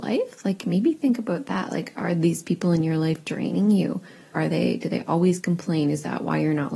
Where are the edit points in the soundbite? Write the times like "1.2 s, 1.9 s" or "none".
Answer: 4.3 s